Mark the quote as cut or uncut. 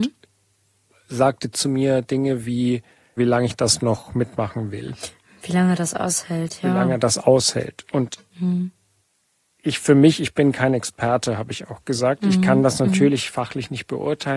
cut